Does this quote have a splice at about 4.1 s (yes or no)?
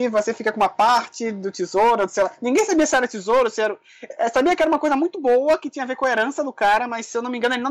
no